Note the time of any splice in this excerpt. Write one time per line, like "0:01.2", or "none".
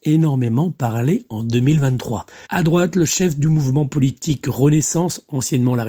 0:02.4